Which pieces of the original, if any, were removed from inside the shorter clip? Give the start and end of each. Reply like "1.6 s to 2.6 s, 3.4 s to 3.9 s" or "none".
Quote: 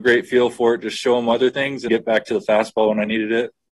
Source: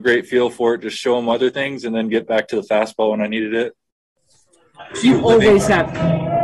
1.9 s to 2.1 s